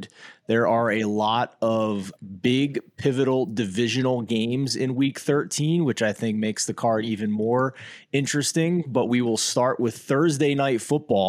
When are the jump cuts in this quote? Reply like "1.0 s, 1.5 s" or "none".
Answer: none